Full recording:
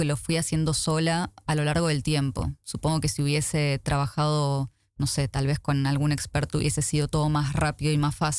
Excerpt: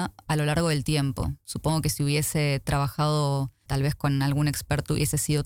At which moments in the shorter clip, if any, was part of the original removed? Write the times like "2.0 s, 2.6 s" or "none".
3.7 s